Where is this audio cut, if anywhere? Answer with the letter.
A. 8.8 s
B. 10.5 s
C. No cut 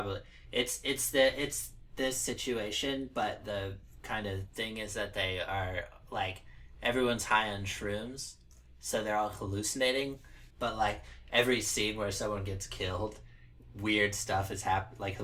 B